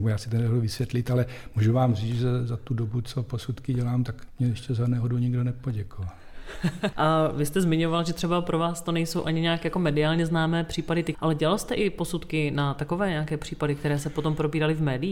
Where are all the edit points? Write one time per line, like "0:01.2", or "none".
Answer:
0:06.9
0:11.1